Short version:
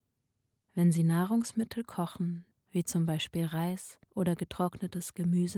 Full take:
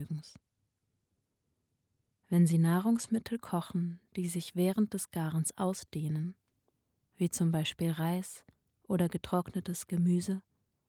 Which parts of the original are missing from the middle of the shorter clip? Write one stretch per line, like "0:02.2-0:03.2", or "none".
0:04.1-0:07.0
0:08.5-0:08.8